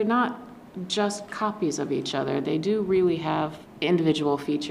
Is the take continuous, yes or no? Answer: yes